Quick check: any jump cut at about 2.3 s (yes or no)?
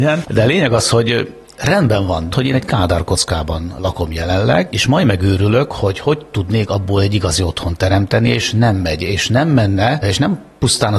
yes